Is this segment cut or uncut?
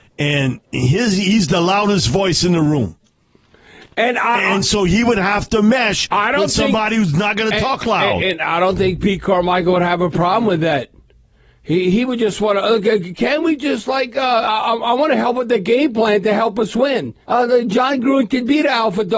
cut